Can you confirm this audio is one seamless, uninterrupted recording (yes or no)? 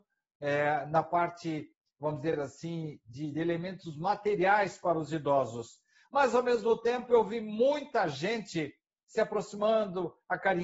yes